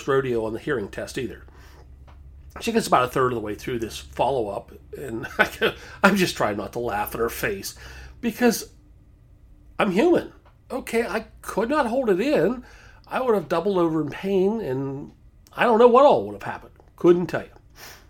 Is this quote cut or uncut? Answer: uncut